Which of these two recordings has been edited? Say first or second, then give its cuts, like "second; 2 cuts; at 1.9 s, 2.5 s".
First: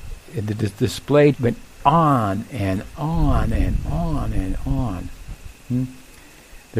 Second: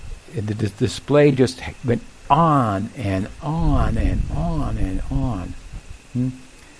first; 1 cut; at 1.3 s